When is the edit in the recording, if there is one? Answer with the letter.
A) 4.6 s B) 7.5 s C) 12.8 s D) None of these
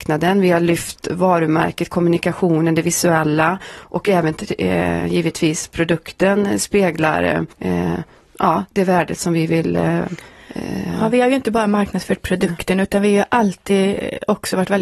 B